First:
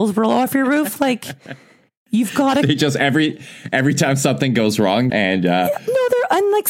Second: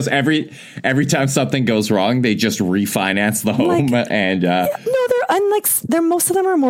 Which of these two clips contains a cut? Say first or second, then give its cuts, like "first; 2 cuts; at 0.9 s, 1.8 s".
first; 1 cut; at 5.1 s